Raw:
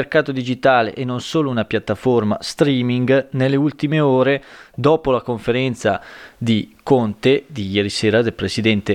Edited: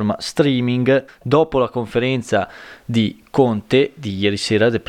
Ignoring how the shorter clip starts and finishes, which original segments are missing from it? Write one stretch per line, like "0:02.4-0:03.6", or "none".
0:03.3-0:04.6